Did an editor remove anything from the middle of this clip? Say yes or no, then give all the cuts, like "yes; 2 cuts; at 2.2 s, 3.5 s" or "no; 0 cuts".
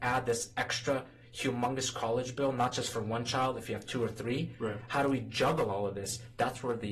no; 0 cuts